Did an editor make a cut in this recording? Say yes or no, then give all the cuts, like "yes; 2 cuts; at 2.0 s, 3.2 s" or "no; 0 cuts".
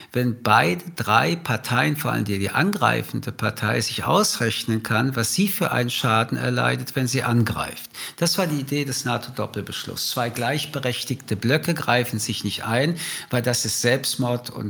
no; 0 cuts